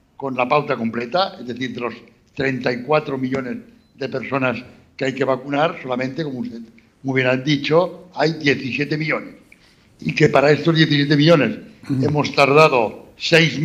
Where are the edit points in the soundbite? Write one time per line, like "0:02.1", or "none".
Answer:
none